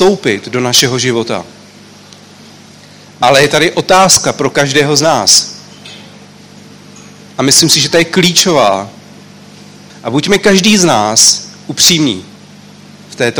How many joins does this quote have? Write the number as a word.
one